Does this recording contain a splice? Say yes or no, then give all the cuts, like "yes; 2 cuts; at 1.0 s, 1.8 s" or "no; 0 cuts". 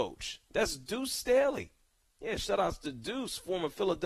no; 0 cuts